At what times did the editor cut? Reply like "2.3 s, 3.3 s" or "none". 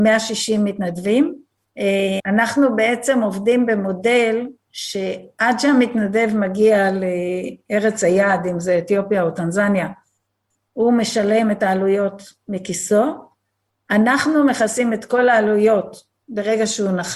2.2 s